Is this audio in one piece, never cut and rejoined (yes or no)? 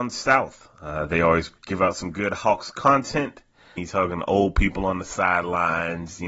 no